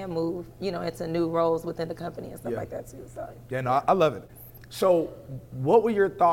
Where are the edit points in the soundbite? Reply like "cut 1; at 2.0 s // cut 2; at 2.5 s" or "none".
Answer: cut 1; at 4.3 s

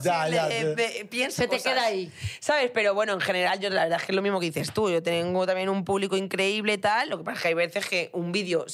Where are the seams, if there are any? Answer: none

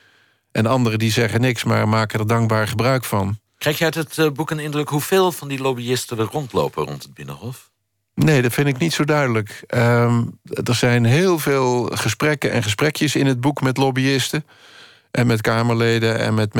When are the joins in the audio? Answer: none

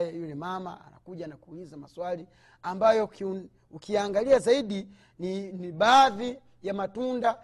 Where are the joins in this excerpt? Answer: none

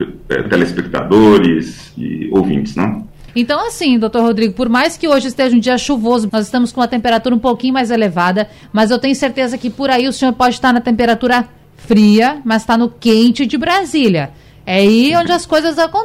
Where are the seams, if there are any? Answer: cut 1; at 3.3 s // cut 2; at 6.3 s

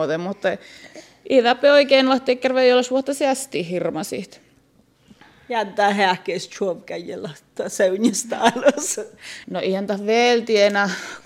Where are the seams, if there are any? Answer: cut 1; at 9.4 s

